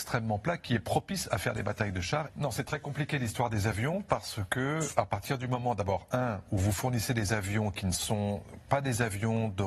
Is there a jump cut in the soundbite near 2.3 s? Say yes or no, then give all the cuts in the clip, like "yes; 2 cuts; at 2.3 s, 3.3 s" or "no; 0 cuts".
yes; 1 cut; at 2.3 s